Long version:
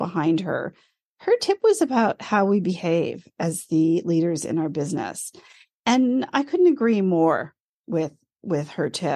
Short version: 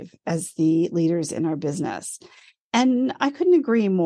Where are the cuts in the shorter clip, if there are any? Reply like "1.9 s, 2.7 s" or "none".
none